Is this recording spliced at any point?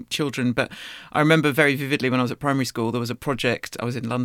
no; 0 cuts

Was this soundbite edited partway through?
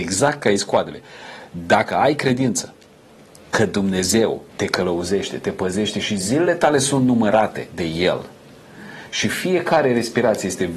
yes; 1 cut; at 4.5 s

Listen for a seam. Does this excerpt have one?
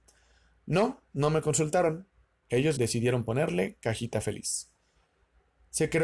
yes; 1 cut; at 2.7 s

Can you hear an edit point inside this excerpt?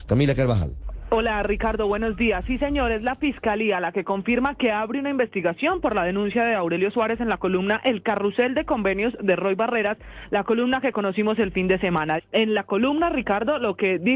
yes; 1 cut; at 12.2 s

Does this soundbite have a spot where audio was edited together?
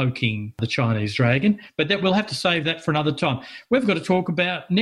no; 0 cuts

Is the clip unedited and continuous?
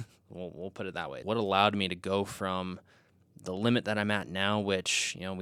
no; 1 cut; at 1.2 s

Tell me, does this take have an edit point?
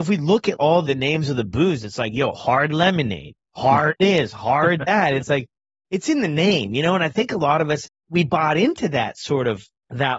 no; 0 cuts

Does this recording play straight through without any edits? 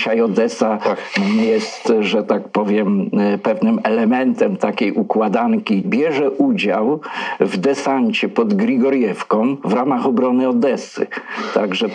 no; 1 cut; at 5.8 s

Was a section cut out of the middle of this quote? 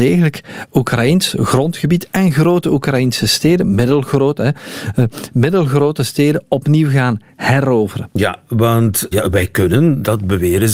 yes; 1 cut; at 9.1 s

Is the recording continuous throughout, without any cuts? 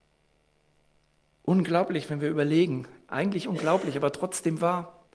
yes; 0 cuts

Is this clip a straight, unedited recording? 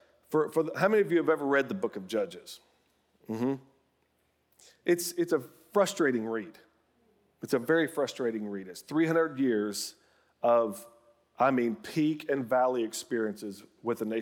yes; 0 cuts

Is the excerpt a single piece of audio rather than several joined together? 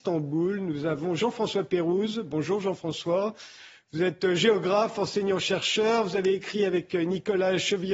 yes; 0 cuts

